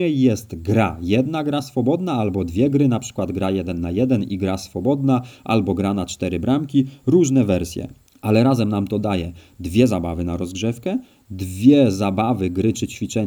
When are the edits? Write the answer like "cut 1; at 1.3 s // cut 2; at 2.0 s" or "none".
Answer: none